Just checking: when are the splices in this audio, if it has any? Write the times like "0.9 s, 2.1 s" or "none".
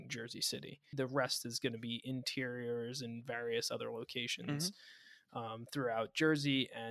0.9 s